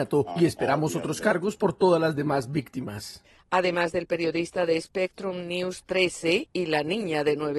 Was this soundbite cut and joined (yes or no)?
no